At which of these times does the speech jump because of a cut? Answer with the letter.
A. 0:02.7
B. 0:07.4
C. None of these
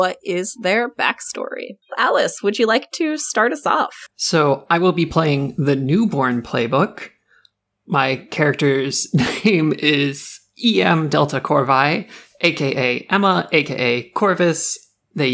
C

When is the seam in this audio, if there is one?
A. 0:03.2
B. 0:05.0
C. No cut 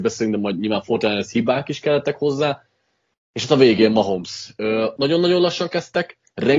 B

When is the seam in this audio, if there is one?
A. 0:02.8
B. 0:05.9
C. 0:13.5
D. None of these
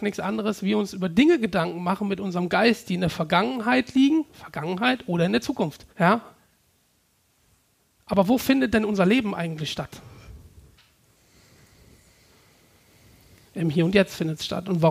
B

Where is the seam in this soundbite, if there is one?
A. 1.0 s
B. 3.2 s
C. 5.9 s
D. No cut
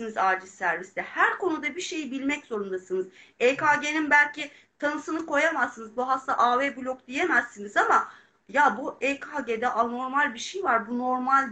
D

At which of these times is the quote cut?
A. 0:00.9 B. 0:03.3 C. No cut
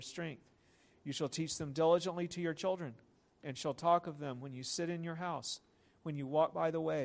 A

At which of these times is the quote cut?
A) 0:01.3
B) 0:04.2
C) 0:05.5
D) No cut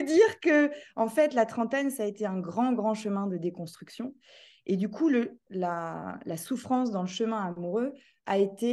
C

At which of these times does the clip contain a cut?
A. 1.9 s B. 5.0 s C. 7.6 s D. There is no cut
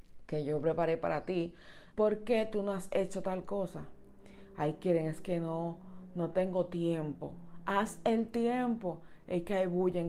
A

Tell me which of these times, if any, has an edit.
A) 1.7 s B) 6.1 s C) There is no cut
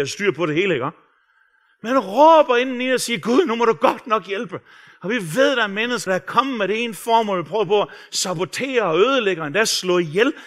B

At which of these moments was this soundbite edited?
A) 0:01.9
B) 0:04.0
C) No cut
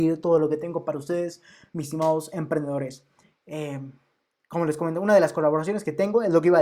C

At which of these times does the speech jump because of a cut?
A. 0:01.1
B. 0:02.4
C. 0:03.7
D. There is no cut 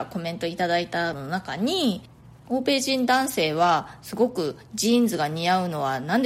A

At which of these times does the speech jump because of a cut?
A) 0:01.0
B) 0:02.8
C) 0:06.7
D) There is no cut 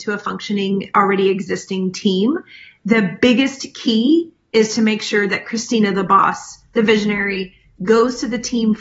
C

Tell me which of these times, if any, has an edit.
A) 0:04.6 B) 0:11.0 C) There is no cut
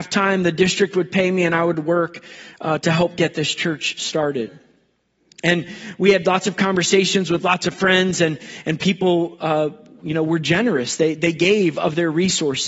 C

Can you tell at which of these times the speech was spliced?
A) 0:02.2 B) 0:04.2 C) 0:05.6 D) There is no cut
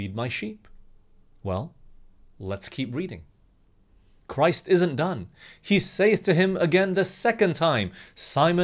B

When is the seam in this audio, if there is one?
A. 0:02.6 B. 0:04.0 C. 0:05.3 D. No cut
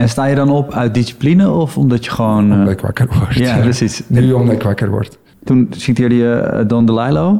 C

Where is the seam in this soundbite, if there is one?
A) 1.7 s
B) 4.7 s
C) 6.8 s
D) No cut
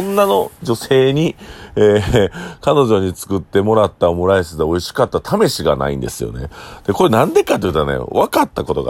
D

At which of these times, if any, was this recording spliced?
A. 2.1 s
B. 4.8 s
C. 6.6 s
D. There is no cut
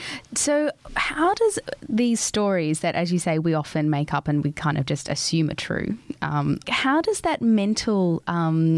C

